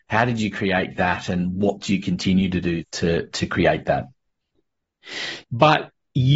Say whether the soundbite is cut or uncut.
cut